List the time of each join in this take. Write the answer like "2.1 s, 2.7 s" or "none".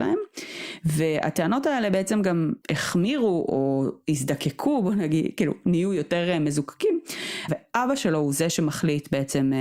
2.6 s, 7.5 s